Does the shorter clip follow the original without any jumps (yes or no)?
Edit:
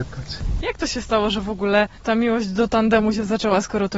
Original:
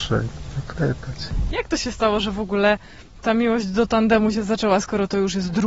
no